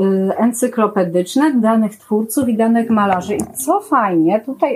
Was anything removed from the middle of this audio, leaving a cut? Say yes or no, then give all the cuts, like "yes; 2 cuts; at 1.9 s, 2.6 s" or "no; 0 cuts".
no; 0 cuts